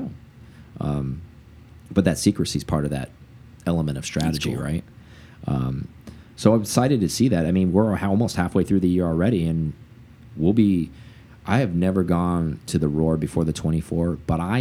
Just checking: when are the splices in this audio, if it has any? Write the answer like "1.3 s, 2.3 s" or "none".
none